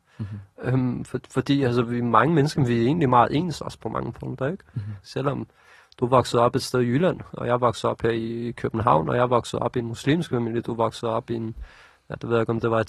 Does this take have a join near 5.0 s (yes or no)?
yes